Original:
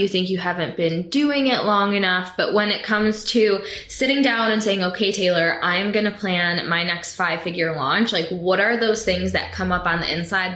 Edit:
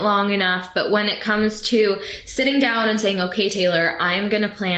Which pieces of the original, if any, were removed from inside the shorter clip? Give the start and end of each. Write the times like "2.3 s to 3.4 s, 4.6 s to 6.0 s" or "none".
none